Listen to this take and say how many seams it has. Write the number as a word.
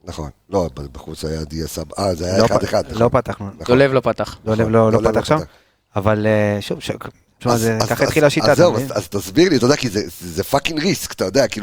zero